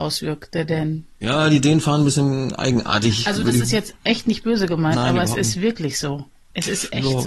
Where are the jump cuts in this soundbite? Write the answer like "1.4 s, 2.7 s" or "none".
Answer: none